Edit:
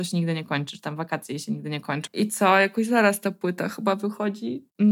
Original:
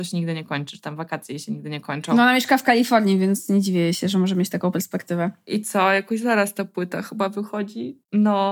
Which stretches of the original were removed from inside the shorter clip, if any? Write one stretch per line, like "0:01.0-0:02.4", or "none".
0:02.1-0:05.4